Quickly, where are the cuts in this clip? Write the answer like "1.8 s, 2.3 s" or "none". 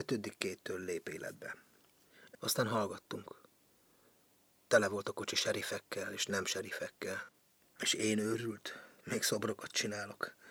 2.3 s, 7.6 s, 9.0 s